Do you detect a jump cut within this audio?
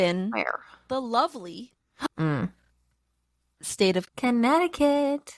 yes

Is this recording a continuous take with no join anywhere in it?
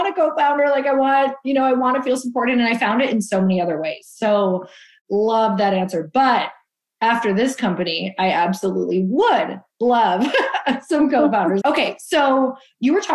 no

